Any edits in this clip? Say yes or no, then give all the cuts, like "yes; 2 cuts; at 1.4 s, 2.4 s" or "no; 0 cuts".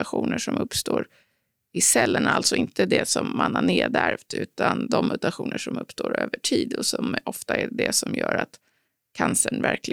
no; 0 cuts